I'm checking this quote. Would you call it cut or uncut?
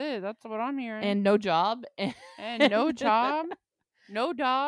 uncut